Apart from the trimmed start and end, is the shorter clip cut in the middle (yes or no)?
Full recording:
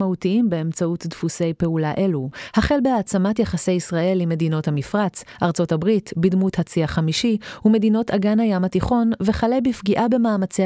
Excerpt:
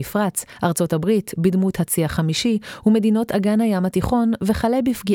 no